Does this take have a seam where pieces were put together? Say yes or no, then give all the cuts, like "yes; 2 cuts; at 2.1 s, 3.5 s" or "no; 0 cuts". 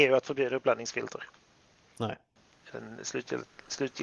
yes; 1 cut; at 2.5 s